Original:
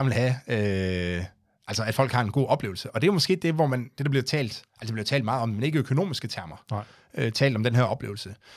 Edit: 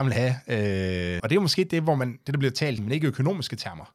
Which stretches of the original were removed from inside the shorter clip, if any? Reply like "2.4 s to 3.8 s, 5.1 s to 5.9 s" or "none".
1.2 s to 2.9 s, 4.5 s to 5.5 s